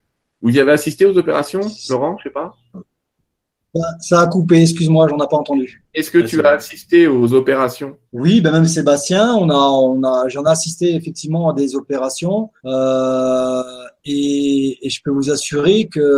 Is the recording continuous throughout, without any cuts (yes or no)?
no